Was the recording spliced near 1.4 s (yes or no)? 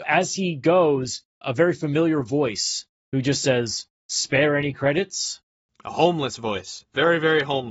yes